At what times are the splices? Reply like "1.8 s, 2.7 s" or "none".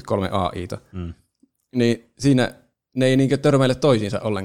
none